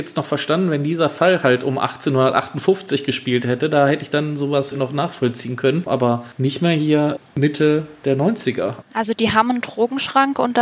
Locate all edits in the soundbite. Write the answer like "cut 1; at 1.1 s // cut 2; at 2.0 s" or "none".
cut 1; at 4.7 s // cut 2; at 5.9 s // cut 3; at 8.8 s